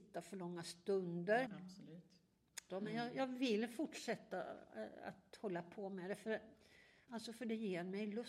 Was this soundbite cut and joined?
yes; 3 cuts; at 1.5 s, 2.7 s, 7.1 s

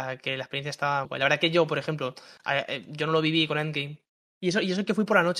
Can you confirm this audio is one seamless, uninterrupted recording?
no; 2 cuts; at 1.1 s, 4.3 s

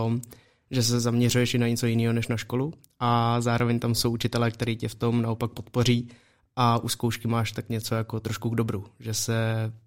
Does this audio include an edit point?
no; 0 cuts

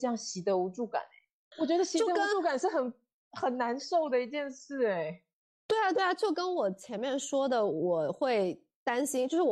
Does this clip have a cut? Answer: no; 0 cuts

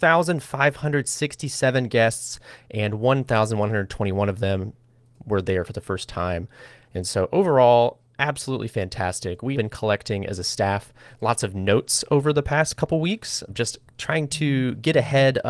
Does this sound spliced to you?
yes; 3 cuts; at 6.8 s, 9.5 s, 13.5 s

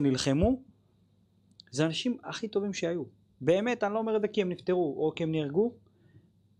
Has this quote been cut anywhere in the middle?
no; 0 cuts

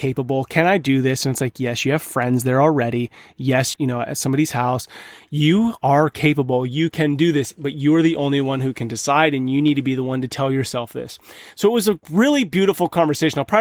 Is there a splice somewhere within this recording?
yes; 1 cut; at 3.7 s

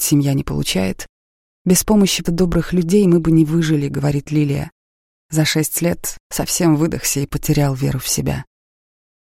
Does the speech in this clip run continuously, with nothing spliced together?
no; 2 cuts; at 2.2 s, 5.1 s

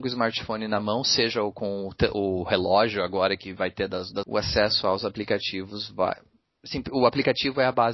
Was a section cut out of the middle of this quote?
yes; 1 cut; at 4.2 s

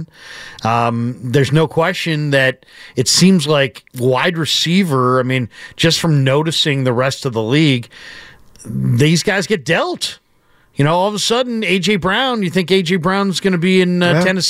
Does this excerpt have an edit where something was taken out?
no; 0 cuts

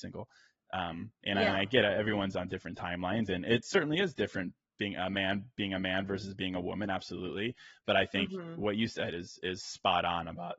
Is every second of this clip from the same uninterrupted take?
yes; 0 cuts

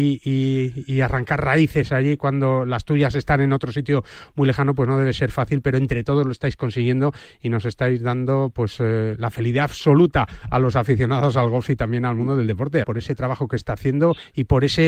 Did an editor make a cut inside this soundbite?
yes; 1 cut; at 12.8 s

